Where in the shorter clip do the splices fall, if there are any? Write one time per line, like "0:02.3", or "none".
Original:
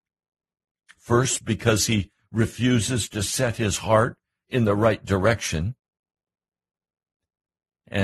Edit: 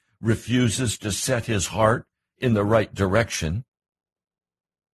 none